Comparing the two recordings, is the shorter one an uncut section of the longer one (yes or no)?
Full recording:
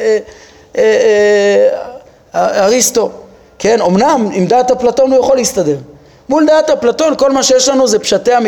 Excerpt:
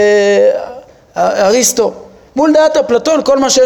no